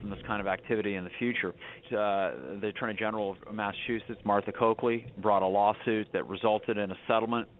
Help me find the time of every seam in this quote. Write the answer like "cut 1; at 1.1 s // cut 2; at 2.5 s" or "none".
cut 1; at 1.8 s